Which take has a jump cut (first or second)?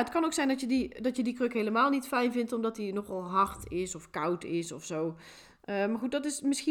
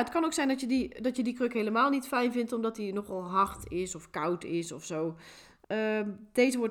second